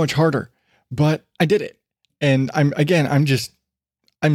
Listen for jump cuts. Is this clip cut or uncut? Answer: uncut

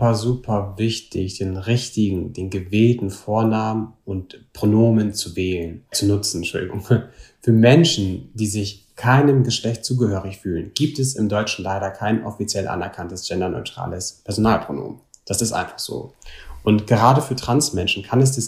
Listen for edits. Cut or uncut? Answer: cut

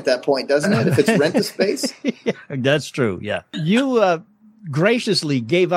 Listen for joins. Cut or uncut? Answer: uncut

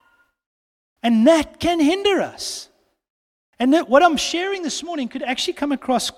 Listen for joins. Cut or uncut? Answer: uncut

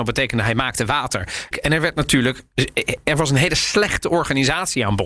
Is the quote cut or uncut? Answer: cut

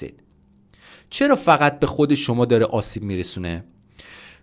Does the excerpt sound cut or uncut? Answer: uncut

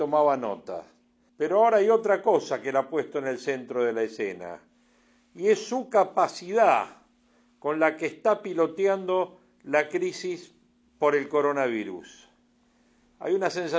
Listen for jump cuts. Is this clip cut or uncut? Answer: cut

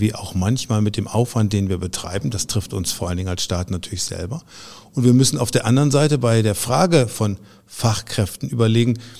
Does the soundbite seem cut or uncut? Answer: uncut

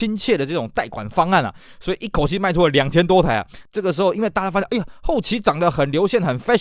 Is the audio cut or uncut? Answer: cut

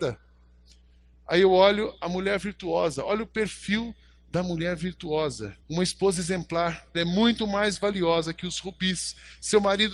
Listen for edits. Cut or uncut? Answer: cut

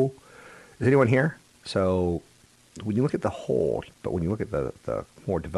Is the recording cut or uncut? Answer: cut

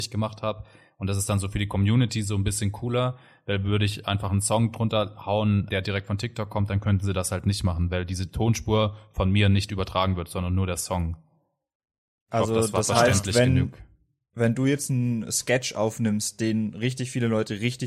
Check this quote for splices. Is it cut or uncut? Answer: cut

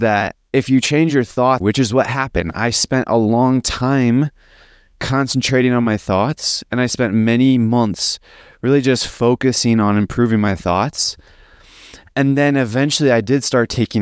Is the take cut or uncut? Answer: cut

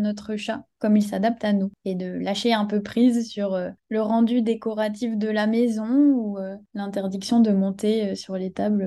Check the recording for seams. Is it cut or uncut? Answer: uncut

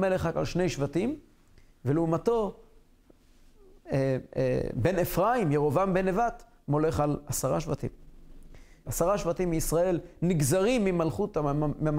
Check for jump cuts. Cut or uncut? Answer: cut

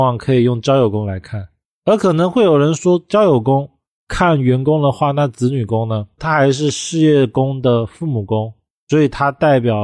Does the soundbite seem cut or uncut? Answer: cut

